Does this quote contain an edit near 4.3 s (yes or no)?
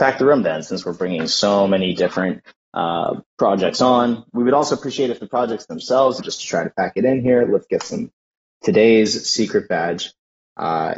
no